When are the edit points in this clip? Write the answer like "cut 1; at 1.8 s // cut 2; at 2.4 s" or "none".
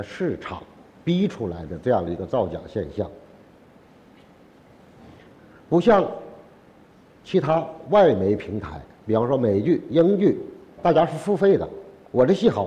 cut 1; at 10.8 s